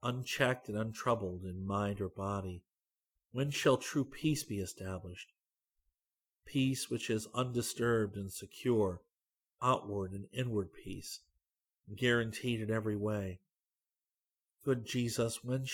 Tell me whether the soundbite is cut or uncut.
uncut